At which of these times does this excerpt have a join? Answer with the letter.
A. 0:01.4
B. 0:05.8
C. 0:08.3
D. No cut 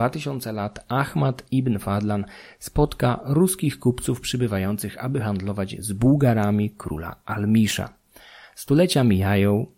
D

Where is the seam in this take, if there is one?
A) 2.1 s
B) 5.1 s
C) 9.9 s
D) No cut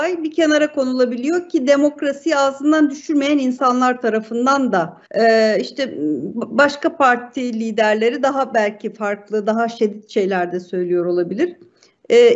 B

